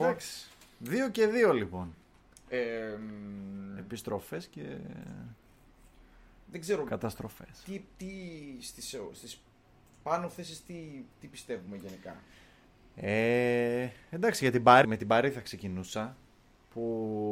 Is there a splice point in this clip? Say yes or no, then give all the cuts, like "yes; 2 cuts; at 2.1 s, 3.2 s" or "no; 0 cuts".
yes; 1 cut; at 14.8 s